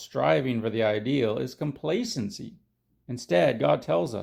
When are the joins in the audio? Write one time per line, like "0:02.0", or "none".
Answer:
0:03.0